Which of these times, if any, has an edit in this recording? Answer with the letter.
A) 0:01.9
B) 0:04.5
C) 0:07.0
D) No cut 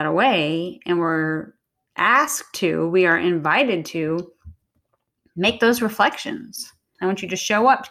C